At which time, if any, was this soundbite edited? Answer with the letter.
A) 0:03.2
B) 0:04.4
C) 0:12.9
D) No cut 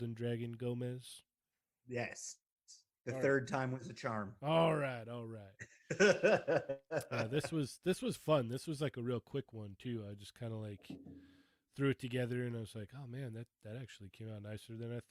D